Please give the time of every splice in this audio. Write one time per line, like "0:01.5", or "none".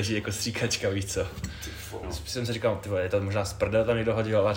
0:02.0